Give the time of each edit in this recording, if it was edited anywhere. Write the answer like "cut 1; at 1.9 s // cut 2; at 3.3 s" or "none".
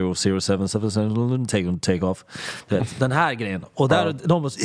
none